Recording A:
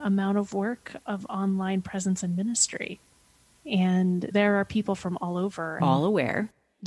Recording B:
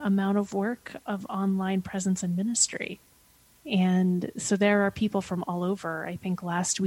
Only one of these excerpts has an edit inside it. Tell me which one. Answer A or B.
A